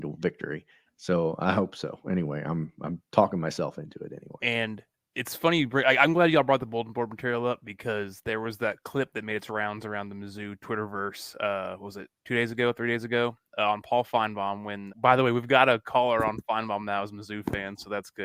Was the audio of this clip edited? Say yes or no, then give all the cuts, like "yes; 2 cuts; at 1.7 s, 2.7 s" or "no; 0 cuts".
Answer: yes; 2 cuts; at 4.4 s, 14.9 s